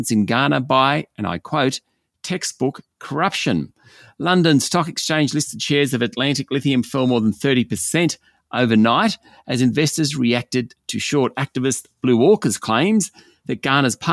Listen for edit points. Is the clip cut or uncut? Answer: uncut